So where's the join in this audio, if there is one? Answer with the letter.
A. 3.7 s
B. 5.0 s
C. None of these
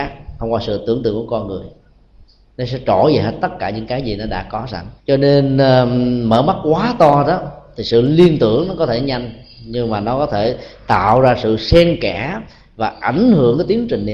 B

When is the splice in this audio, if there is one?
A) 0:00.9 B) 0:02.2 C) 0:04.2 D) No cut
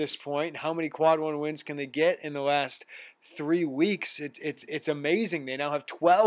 D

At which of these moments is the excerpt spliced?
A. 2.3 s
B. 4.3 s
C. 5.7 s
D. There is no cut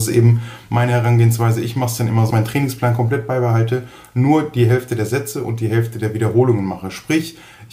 A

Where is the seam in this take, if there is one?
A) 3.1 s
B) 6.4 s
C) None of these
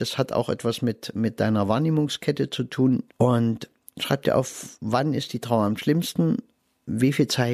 A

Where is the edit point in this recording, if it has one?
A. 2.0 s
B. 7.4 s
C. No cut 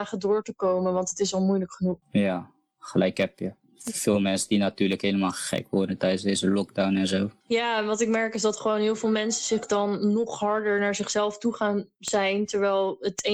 C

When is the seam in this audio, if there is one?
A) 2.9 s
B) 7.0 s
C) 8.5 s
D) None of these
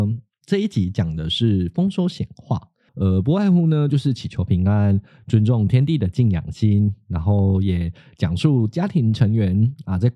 A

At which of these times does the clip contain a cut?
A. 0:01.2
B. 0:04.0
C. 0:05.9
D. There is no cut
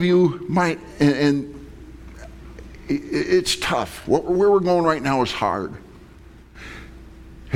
D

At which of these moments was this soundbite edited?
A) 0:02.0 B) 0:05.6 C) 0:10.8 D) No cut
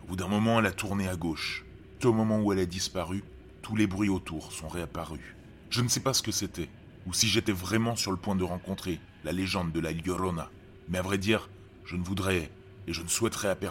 A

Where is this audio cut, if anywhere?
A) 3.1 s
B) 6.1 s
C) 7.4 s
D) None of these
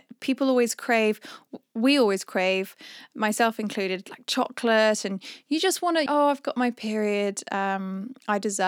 B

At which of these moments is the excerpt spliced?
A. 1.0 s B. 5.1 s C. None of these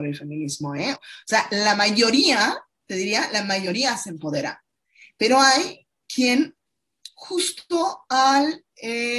A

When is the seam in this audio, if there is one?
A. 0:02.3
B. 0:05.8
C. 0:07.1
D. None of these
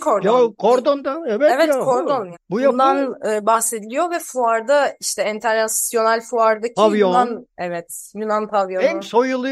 A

